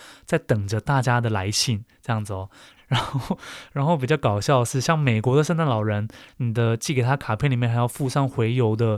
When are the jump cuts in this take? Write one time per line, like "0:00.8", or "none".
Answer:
0:02.8
0:06.3